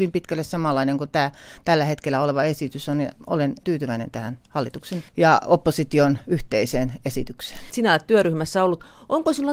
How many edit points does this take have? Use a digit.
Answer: 3